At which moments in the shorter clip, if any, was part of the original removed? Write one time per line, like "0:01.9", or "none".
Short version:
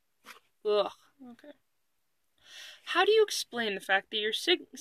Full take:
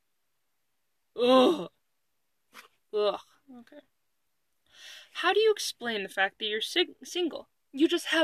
none